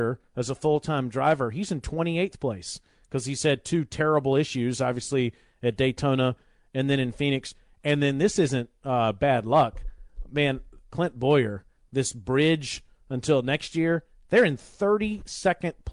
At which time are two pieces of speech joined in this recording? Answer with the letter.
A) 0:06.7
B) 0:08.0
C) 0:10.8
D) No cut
C